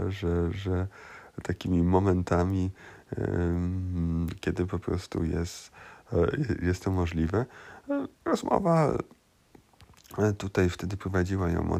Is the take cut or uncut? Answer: cut